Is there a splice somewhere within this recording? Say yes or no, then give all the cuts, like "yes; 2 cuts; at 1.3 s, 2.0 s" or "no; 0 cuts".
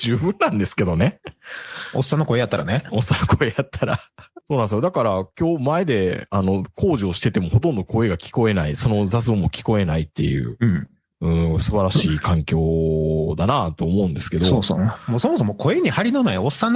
no; 0 cuts